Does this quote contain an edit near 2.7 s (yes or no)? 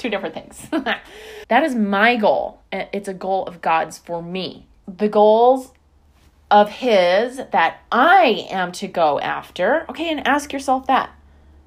no